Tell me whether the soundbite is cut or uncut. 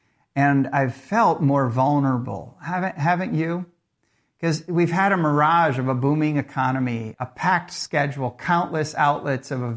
cut